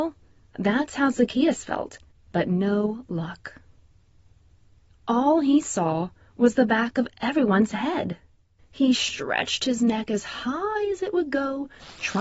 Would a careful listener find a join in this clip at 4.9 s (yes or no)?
no